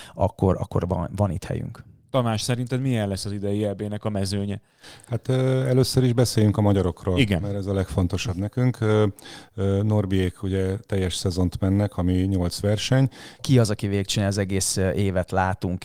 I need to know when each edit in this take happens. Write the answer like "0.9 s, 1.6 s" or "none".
13.4 s